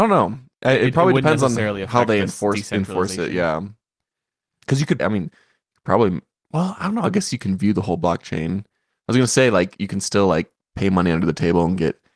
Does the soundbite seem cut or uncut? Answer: cut